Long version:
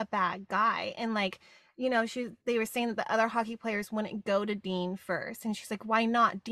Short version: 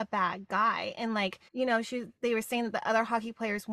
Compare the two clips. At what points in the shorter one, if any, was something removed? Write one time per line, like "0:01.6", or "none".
0:01.5